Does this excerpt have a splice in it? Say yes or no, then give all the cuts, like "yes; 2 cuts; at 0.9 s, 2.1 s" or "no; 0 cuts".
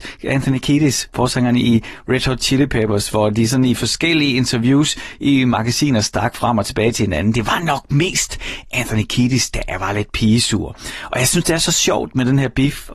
no; 0 cuts